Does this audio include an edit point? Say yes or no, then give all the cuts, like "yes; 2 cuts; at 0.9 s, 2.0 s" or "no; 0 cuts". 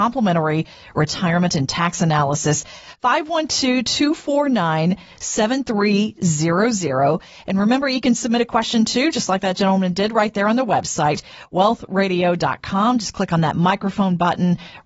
no; 0 cuts